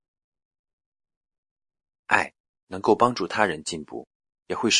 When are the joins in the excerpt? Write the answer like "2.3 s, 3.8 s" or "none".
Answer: 2.0 s